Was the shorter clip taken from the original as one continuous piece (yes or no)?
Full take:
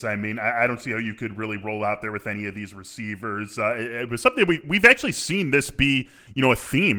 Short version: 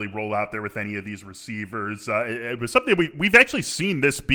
yes